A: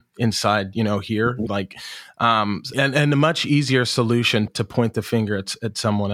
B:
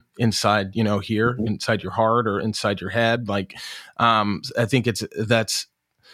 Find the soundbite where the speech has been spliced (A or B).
A